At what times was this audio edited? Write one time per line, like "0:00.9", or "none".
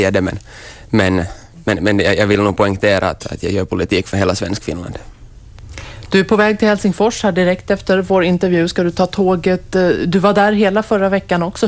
none